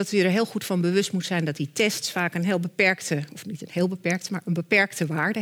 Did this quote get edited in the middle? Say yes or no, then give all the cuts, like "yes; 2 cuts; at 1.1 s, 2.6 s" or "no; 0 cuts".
no; 0 cuts